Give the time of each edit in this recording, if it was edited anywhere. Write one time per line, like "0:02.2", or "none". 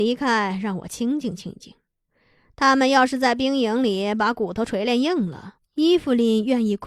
0:05.6